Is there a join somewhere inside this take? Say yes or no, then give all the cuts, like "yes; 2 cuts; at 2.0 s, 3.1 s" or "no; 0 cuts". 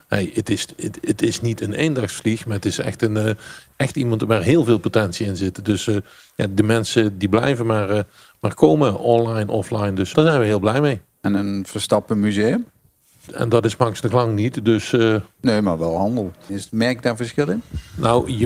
yes; 3 cuts; at 10.1 s, 13.3 s, 16.5 s